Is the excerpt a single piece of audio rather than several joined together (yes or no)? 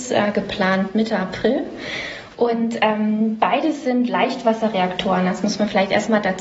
yes